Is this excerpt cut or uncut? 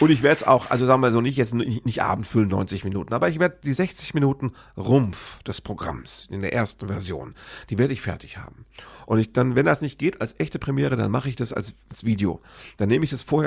uncut